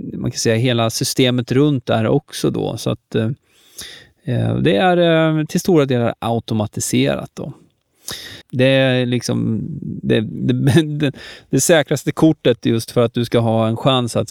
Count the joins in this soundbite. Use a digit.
1